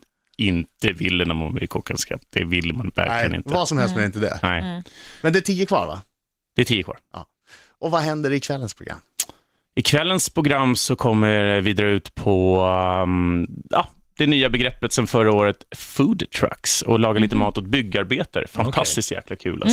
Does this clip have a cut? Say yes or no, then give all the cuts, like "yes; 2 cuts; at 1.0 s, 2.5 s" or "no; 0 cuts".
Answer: no; 0 cuts